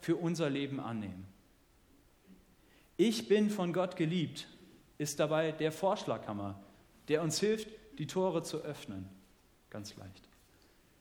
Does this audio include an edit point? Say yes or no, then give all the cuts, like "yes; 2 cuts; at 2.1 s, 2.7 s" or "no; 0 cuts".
no; 0 cuts